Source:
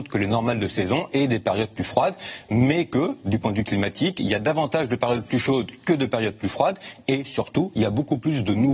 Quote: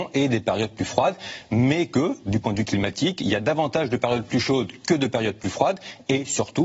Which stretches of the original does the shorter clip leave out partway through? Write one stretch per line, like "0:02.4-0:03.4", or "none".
none